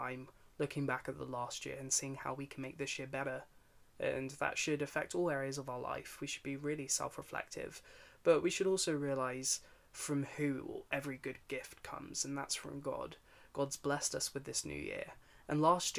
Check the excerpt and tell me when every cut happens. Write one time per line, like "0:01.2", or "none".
none

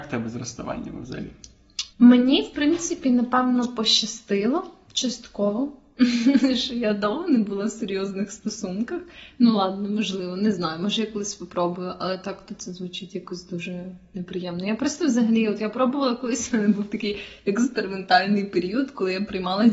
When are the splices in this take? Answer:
0:01.9
0:09.4

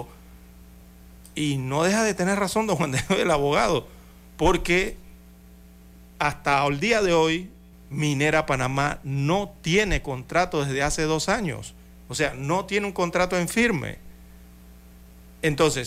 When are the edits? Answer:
0:07.7

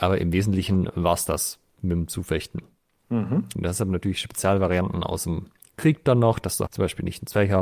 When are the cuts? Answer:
0:03.5
0:06.7

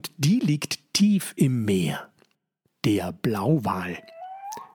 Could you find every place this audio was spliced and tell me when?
0:02.6

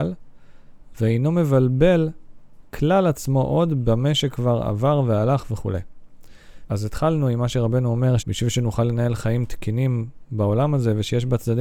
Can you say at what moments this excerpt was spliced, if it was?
0:06.7
0:08.2

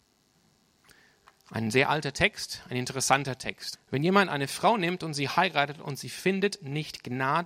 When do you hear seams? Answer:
0:03.7

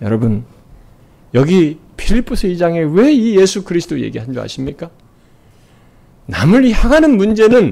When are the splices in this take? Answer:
none

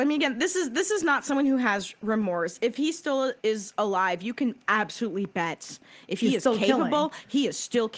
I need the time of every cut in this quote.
none

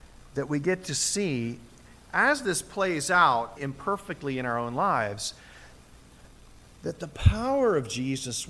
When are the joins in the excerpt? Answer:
0:03.6

